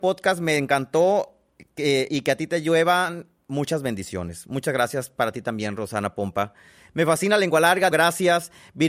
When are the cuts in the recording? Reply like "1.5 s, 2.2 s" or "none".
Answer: 2.1 s, 7.9 s